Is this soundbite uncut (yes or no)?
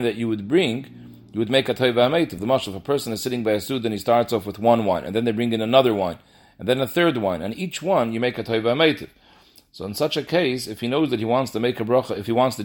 yes